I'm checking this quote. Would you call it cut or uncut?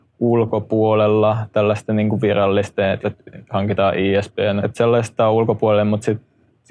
cut